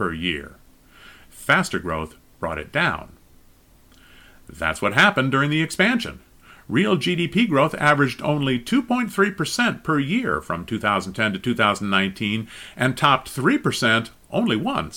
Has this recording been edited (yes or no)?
yes